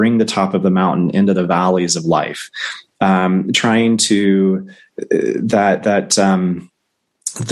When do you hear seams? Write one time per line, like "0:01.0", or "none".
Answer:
none